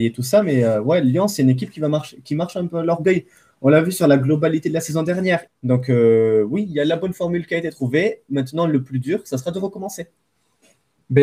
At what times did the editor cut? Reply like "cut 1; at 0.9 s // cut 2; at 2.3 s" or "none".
cut 1; at 5.5 s